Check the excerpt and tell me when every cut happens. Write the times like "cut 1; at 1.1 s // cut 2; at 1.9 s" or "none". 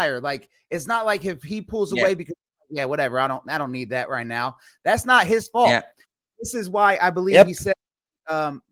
none